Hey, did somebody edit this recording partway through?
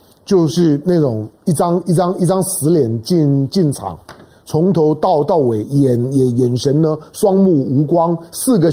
no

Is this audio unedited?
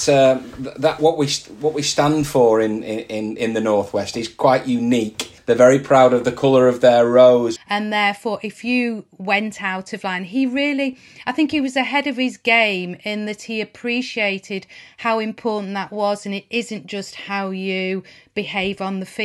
no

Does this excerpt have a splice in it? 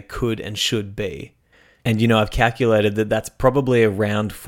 yes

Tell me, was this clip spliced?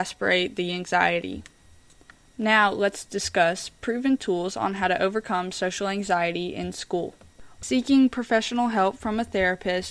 yes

